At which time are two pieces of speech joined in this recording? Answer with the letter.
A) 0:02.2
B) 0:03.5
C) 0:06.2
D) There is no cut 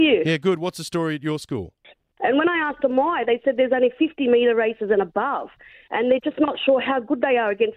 A